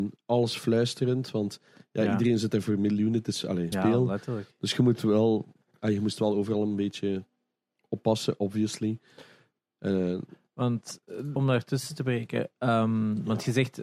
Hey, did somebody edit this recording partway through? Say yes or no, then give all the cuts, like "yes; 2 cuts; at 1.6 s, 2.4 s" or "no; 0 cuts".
yes; 2 cuts; at 3.7 s, 11.4 s